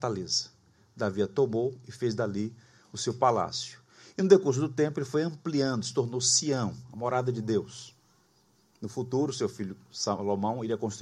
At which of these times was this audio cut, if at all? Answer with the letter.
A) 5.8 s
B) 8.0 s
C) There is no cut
C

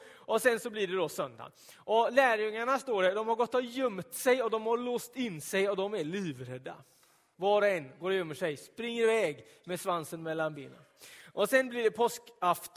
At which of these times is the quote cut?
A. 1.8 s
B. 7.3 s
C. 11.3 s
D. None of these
B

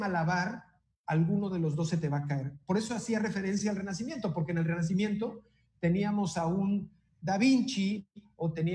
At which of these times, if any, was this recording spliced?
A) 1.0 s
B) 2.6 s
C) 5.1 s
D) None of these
D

